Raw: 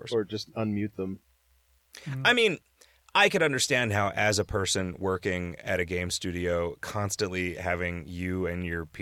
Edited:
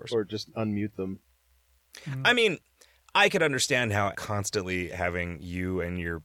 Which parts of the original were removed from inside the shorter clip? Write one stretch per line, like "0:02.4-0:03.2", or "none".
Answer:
0:04.1-0:06.8